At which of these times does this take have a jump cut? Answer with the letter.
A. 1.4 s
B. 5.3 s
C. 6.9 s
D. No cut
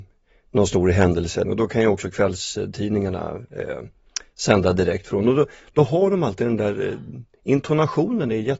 A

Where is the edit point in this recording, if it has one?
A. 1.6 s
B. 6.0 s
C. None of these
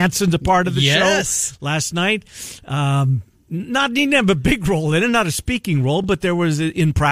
C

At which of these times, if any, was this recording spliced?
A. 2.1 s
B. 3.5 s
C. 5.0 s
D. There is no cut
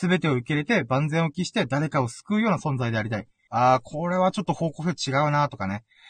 B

